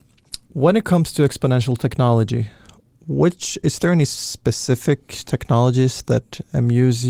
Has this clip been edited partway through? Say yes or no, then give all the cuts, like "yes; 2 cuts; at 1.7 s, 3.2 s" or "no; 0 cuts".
no; 0 cuts